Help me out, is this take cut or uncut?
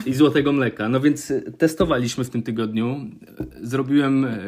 uncut